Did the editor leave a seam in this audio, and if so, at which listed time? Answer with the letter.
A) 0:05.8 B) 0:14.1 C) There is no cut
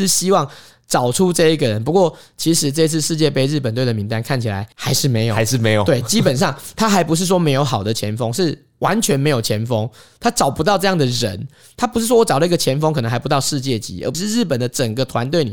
B